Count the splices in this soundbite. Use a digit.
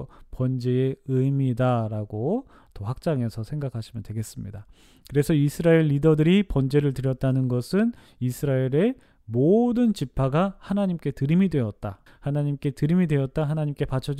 1